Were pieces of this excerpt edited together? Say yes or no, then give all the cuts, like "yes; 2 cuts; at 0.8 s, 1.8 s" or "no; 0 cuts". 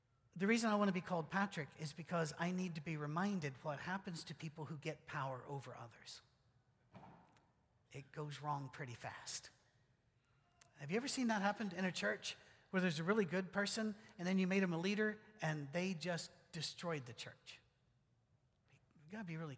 no; 0 cuts